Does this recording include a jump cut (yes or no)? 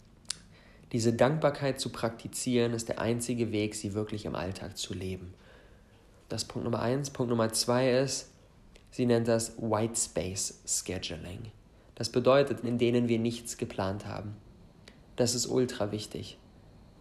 yes